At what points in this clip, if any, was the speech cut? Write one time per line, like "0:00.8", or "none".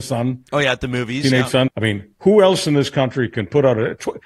0:01.7